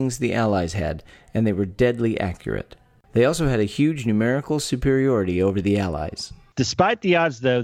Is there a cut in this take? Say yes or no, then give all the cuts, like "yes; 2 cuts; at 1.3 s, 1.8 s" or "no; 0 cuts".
no; 0 cuts